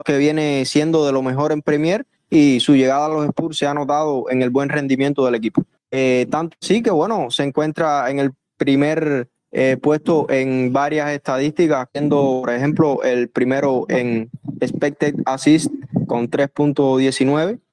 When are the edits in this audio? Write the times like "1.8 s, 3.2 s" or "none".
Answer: 11.9 s